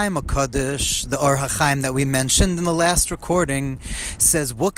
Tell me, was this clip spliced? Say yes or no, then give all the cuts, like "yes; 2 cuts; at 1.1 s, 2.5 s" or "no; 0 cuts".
no; 0 cuts